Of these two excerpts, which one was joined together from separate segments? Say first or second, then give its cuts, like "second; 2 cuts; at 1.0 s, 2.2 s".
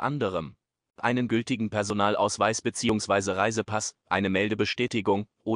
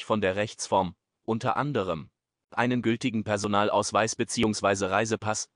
second; 1 cut; at 1.1 s